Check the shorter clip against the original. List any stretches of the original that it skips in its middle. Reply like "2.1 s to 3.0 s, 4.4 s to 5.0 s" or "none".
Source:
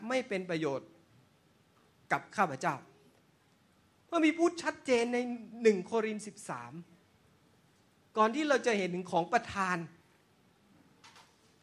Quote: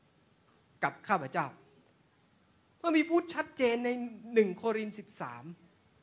none